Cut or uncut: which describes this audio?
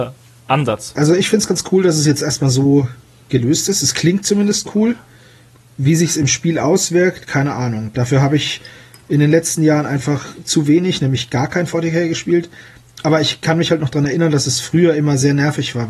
uncut